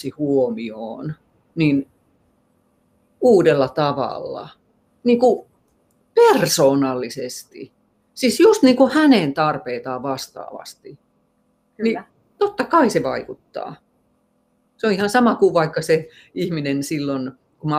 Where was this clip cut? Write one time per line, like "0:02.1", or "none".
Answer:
none